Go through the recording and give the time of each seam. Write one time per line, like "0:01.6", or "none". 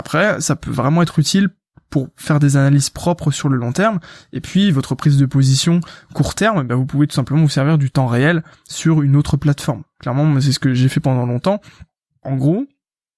0:12.2